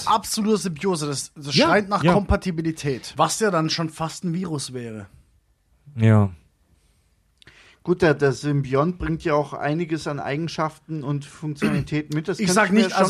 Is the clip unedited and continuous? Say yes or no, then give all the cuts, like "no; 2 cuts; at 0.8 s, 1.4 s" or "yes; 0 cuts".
no; 1 cut; at 3.1 s